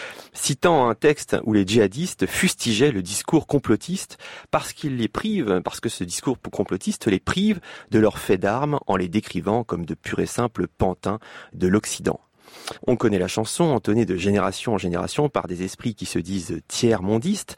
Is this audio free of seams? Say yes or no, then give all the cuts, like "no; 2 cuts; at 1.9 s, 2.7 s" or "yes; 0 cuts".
no; 1 cut; at 12.8 s